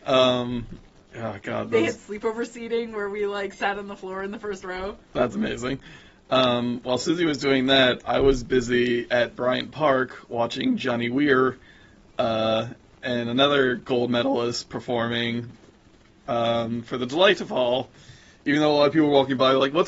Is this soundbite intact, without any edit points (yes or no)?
yes